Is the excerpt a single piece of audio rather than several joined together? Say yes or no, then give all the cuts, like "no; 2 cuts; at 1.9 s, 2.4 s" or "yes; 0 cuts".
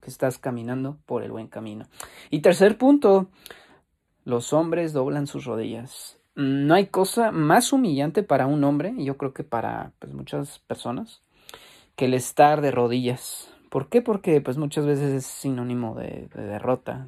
yes; 0 cuts